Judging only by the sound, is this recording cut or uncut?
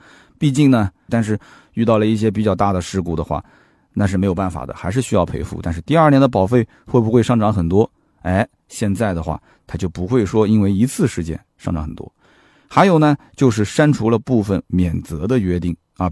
cut